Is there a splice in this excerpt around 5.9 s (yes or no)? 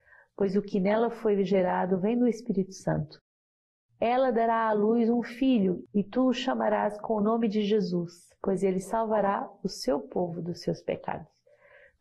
no